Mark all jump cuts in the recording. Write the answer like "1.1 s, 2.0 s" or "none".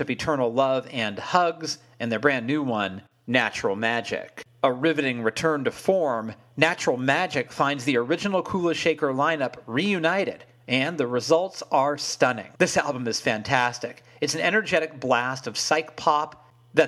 12.6 s